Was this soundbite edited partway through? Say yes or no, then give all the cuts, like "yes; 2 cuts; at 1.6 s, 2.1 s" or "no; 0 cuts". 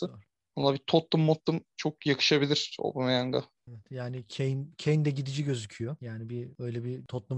no; 0 cuts